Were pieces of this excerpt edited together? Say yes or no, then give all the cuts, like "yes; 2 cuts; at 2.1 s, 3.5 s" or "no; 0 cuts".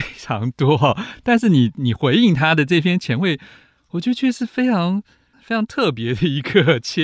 no; 0 cuts